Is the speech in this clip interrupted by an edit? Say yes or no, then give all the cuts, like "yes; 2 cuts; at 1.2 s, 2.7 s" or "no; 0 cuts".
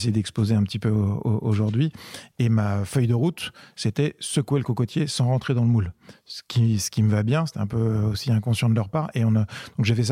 yes; 1 cut; at 2.3 s